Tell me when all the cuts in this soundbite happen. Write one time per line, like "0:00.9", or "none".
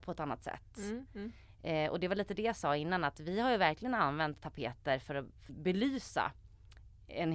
0:01.1
0:05.5